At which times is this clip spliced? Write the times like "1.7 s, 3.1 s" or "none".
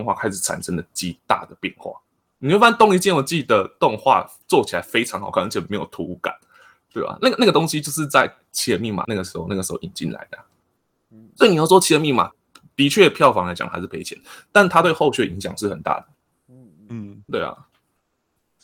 9.0 s